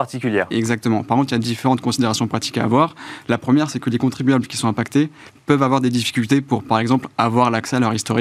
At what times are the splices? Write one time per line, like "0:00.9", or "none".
none